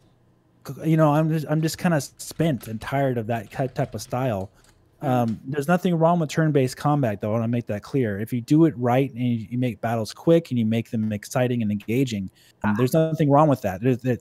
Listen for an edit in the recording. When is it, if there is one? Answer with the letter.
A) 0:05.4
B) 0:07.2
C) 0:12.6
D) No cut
C